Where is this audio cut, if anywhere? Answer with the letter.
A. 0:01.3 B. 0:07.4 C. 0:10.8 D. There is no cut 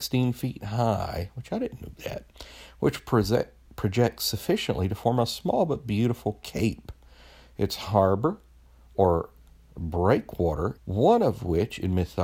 C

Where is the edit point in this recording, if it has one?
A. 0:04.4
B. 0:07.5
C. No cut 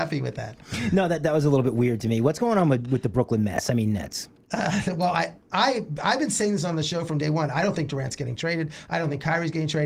C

